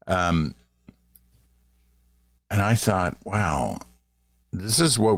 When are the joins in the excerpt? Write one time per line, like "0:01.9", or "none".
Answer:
none